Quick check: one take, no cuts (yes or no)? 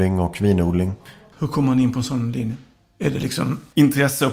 yes